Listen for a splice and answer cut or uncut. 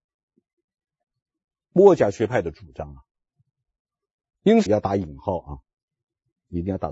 cut